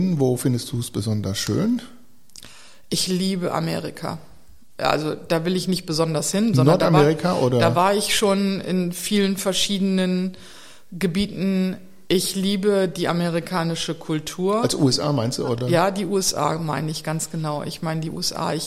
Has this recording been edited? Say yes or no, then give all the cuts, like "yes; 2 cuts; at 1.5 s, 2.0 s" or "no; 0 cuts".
no; 0 cuts